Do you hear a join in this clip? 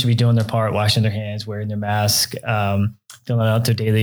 no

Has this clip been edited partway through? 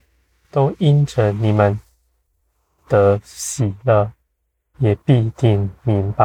yes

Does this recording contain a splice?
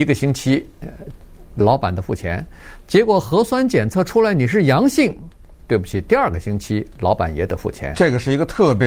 no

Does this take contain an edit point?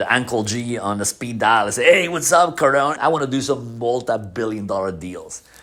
yes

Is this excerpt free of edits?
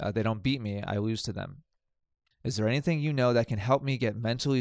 no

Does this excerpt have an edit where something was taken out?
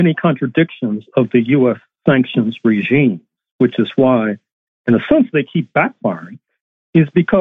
no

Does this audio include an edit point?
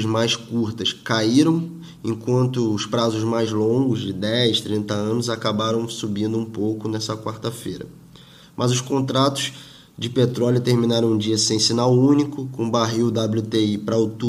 yes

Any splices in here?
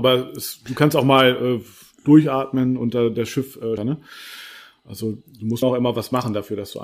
yes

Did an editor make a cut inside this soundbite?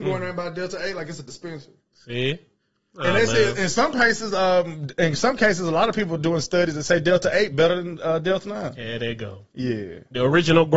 no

